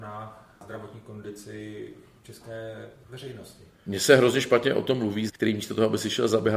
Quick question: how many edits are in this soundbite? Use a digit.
1